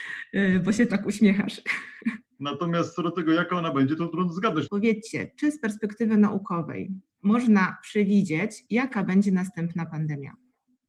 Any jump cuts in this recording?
yes; 2 cuts; at 2.2 s, 4.7 s

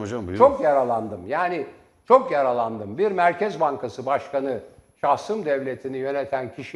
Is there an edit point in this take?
no; 0 cuts

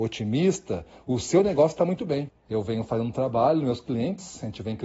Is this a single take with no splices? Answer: no; 1 cut; at 2.3 s

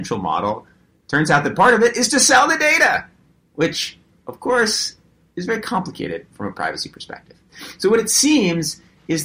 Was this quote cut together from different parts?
no; 0 cuts

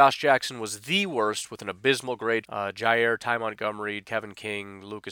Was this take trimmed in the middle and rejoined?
yes; 2 cuts; at 2.4 s, 4.0 s

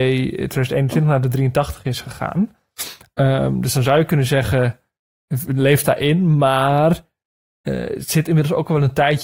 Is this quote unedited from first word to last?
yes; 0 cuts

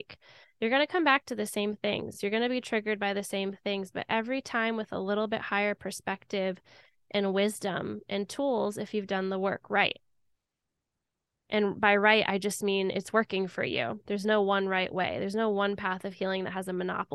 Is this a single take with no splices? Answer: yes; 0 cuts

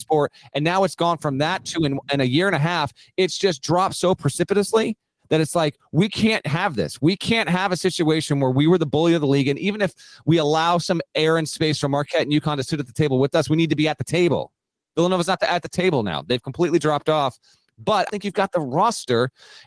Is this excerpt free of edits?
no; 1 cut; at 18.1 s

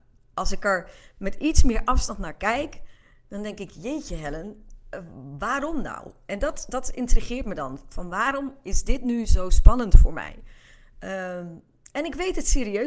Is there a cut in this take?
no; 0 cuts

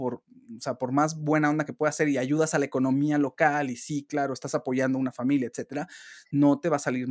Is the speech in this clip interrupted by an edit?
no; 0 cuts

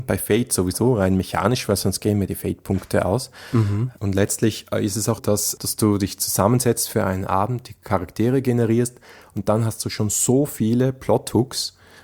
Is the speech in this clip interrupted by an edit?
yes; 1 cut; at 5.2 s

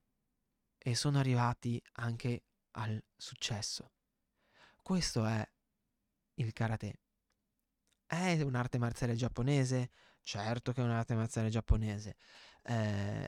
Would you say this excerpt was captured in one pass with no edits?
yes; 0 cuts

